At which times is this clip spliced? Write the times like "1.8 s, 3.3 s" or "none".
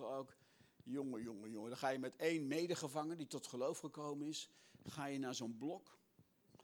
none